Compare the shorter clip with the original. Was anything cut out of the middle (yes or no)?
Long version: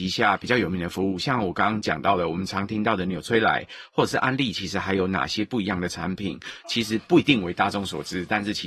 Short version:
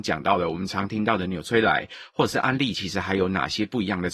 no